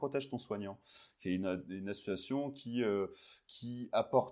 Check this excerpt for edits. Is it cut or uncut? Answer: uncut